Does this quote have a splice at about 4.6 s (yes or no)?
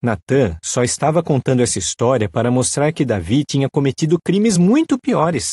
no